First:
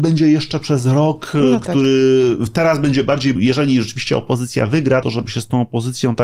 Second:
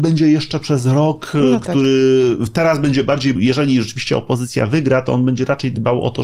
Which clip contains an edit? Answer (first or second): first